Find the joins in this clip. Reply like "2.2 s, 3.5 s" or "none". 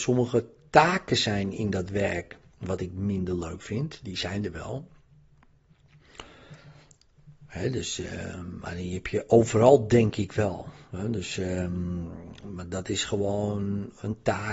none